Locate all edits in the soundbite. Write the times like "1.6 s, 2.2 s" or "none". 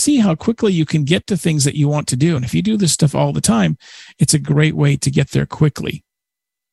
none